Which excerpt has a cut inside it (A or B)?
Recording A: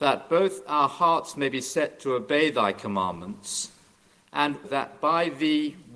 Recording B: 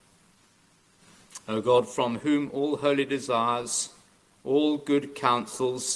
A